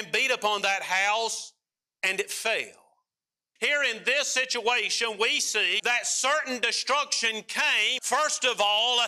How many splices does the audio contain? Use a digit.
3